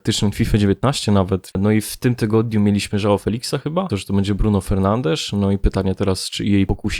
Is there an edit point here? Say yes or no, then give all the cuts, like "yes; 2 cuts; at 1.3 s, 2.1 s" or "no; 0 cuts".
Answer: yes; 2 cuts; at 1.5 s, 3.9 s